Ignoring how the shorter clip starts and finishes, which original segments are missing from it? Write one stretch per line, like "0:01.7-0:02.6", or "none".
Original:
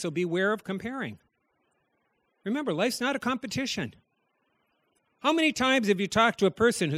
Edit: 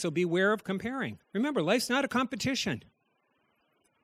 0:01.2-0:02.3